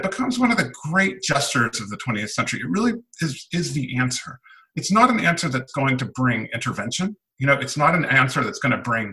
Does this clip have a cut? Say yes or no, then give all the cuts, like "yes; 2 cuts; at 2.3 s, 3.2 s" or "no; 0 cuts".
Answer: no; 0 cuts